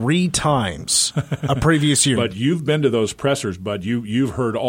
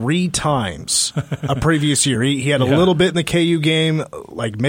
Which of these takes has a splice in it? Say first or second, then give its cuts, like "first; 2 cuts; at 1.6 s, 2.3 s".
first; 1 cut; at 2.2 s